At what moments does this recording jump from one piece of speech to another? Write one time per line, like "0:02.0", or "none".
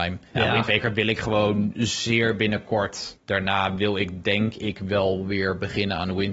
0:03.2